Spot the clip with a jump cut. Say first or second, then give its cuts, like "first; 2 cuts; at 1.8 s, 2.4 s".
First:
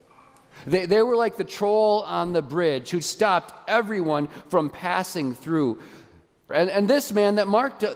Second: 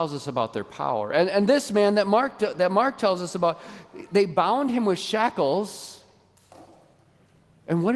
first; 2 cuts; at 3.0 s, 6.5 s